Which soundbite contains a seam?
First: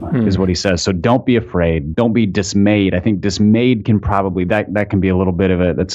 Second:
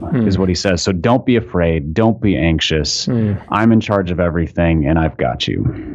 first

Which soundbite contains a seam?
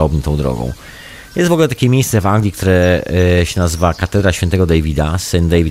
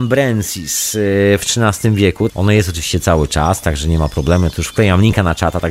second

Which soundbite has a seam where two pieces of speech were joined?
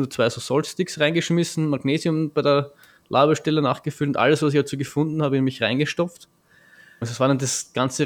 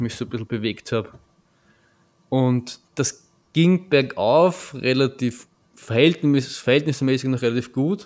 first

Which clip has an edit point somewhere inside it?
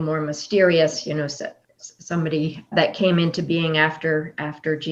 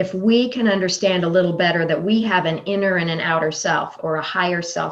first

